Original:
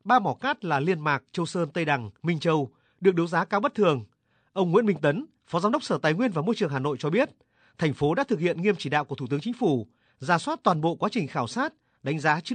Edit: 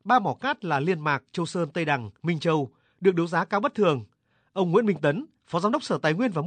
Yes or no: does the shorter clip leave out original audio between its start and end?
no